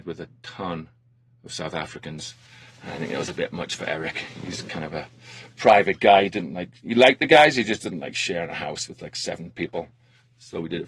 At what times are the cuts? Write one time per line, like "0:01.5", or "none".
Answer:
none